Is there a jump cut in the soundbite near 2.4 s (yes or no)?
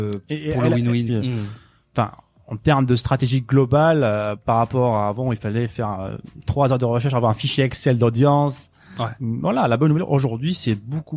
no